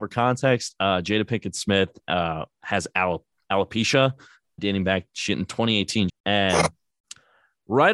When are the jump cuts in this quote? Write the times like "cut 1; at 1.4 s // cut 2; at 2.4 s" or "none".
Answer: cut 1; at 4.6 s // cut 2; at 6.1 s